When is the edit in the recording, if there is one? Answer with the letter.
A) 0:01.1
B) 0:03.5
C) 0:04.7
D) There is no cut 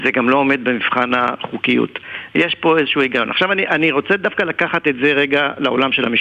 D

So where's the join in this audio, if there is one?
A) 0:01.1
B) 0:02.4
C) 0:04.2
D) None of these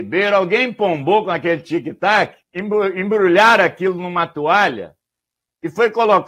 B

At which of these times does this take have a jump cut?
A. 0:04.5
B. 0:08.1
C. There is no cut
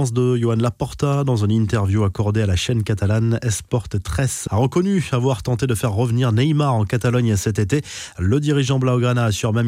A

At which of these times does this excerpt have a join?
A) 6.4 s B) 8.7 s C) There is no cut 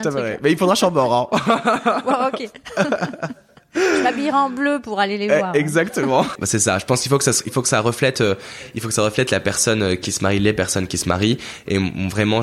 A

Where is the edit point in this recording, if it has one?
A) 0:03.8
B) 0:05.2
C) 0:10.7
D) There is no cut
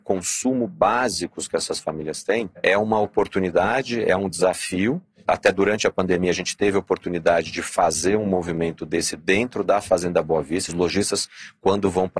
C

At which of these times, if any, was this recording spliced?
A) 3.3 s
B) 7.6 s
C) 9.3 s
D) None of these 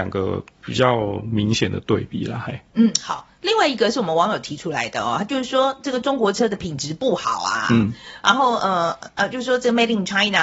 D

